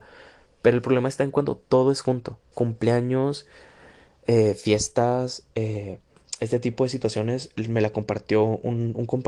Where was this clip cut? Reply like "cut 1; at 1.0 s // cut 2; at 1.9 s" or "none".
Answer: cut 1; at 2.5 s